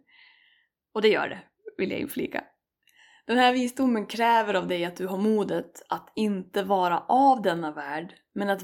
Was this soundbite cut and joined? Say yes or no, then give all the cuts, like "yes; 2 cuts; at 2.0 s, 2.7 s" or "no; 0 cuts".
no; 0 cuts